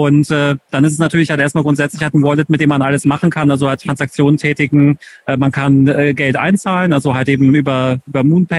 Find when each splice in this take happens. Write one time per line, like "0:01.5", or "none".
none